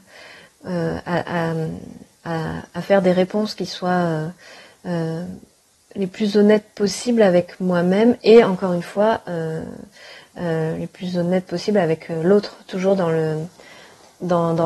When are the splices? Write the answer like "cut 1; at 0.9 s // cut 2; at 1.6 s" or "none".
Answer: none